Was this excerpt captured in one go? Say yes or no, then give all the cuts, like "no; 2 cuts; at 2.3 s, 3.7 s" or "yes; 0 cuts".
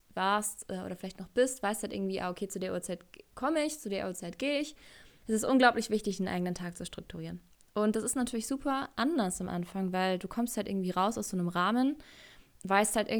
no; 1 cut; at 5.2 s